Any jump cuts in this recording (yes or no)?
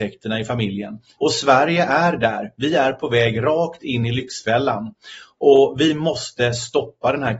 yes